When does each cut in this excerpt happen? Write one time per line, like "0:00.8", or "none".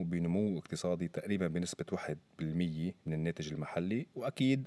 0:03.0